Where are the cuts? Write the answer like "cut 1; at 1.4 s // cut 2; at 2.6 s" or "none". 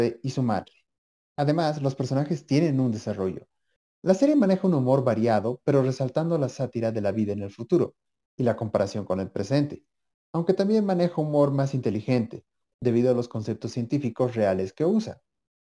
cut 1; at 3.8 s